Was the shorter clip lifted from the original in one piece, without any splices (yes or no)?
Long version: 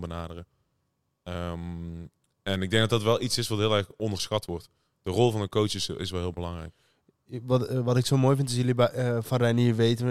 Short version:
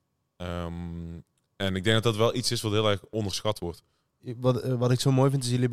no